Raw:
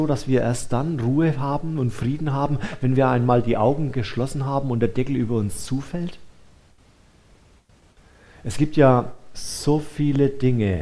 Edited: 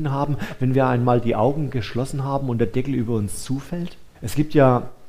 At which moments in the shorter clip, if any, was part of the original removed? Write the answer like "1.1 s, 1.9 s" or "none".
4.1 s

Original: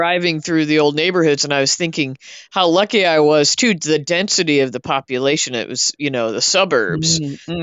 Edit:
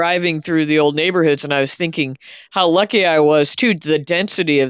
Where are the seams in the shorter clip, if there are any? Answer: none

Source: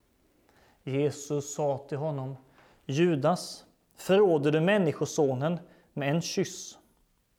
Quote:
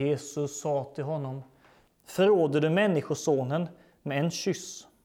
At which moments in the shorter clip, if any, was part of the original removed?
1.9 s

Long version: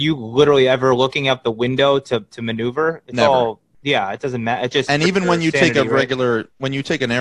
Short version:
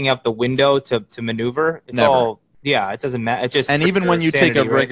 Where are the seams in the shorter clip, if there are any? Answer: none

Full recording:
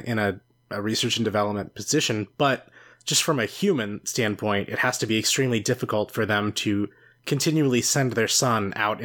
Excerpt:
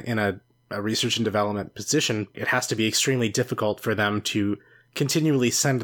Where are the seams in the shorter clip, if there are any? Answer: 2.3 s

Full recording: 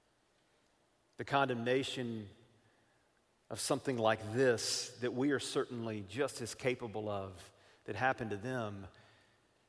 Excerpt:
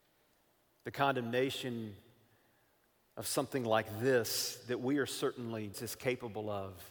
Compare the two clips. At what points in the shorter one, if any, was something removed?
5.7 s

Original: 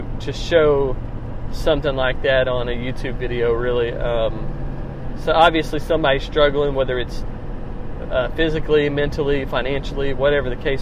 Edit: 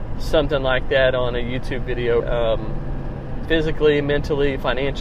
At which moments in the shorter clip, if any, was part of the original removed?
2.2 s, 3.4 s

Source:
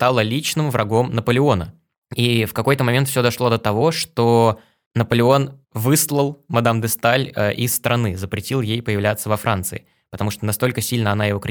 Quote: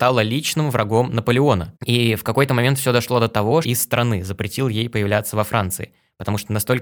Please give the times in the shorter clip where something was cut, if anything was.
1.8 s, 3.6 s

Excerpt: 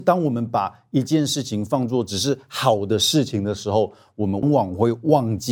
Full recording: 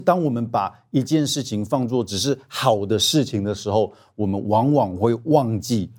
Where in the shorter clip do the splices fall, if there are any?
4.4 s

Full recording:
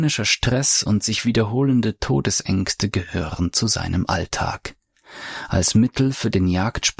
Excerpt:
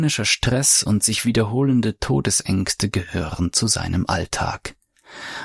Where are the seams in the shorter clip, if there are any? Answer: none

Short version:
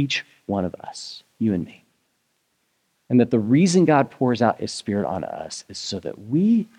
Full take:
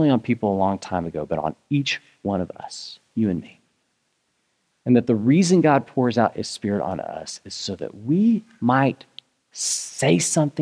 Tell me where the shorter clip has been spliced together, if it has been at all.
none

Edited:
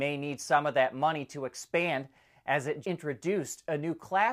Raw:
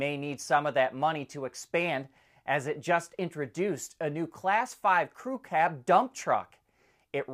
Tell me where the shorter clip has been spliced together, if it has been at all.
2.8 s

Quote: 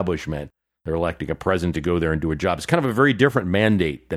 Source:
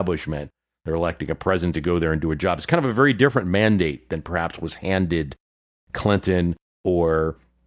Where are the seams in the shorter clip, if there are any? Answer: none

